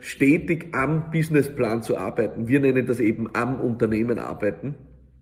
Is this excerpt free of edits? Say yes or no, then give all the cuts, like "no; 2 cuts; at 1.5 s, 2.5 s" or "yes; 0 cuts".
yes; 0 cuts